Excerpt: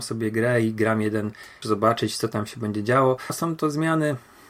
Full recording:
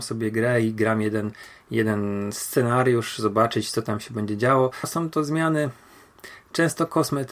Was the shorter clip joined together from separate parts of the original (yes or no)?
yes